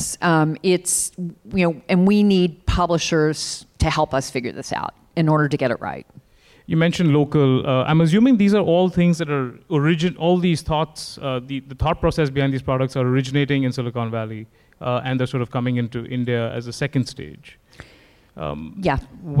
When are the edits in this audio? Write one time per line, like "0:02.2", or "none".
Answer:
none